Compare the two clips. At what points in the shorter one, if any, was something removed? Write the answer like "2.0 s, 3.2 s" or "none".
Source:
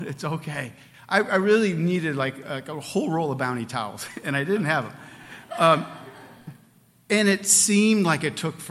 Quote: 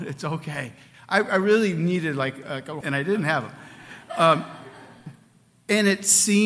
2.8 s